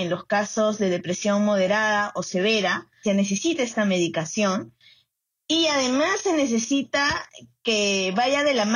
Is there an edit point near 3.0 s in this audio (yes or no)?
yes